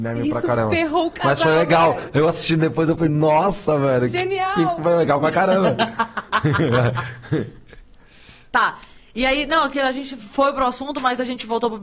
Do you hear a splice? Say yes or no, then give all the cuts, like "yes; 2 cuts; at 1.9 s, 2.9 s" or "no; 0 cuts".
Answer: no; 0 cuts